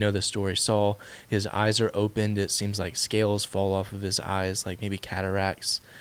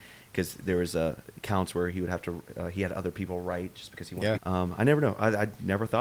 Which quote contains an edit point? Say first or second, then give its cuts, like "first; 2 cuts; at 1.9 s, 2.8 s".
second; 1 cut; at 4.4 s